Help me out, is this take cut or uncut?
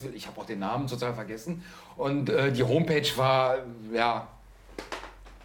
uncut